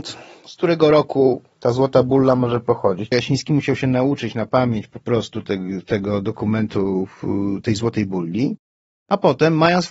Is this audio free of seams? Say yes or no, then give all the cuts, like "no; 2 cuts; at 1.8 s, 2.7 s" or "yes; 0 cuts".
no; 1 cut; at 3.1 s